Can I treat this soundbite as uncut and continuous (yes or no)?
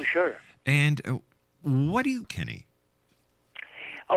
no